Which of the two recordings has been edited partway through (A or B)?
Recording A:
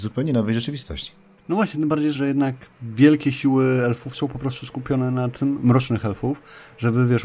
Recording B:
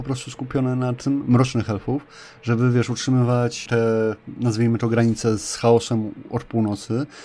A